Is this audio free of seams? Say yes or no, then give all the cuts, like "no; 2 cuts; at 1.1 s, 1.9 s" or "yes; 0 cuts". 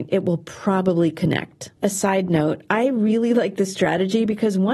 no; 1 cut; at 1.8 s